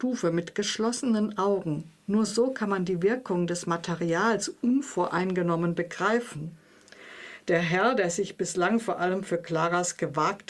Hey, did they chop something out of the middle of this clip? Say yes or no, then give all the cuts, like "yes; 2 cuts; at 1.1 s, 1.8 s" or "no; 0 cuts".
no; 0 cuts